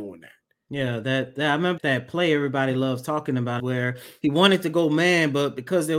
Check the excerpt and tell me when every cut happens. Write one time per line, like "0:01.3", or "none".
0:01.8
0:03.6